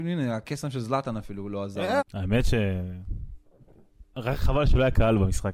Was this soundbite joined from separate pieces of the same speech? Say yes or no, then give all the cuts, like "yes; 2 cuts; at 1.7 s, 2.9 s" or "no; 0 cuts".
yes; 2 cuts; at 2.0 s, 4.1 s